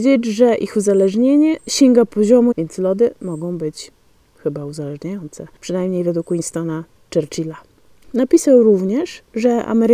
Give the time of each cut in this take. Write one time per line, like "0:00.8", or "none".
0:02.5
0:08.0